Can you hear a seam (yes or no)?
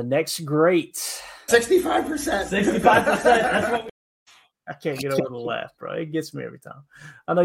no